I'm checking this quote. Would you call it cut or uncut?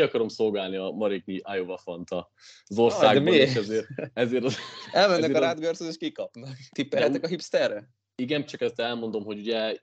cut